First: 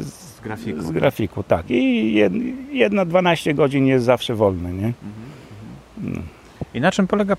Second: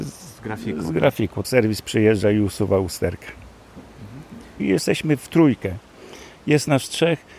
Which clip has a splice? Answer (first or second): second